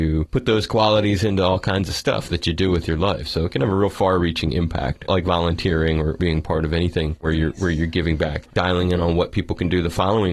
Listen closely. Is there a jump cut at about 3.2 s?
no; 0 cuts

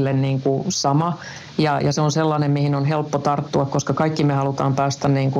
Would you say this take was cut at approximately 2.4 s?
no; 0 cuts

